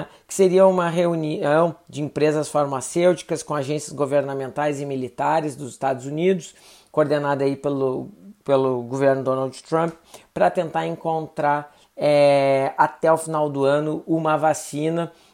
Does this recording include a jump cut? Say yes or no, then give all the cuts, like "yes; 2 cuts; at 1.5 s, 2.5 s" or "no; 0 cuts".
no; 0 cuts